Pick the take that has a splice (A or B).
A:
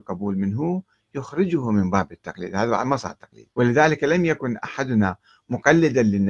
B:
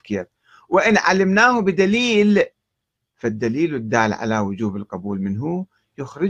A